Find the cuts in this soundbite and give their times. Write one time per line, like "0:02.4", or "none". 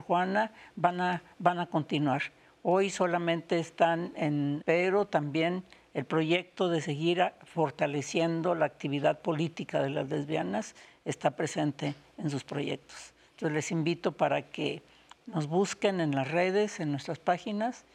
0:04.6